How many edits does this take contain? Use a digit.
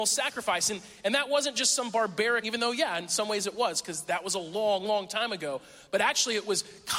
1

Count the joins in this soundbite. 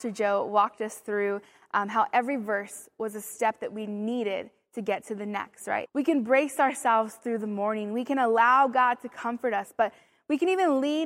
1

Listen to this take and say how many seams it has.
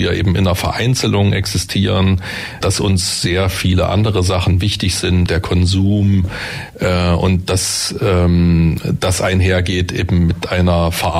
2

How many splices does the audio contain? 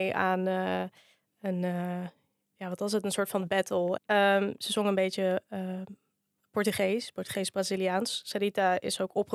1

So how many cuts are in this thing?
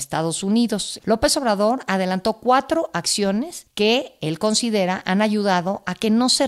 1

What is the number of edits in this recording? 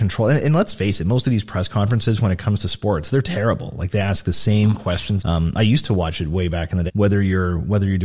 2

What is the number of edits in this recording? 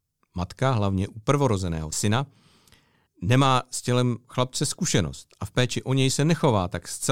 1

